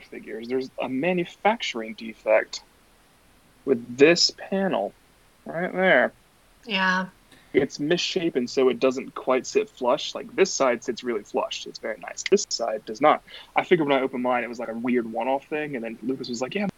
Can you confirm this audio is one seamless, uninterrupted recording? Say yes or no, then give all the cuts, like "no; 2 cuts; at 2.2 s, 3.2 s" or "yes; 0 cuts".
yes; 0 cuts